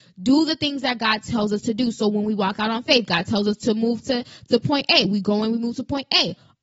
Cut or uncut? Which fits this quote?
uncut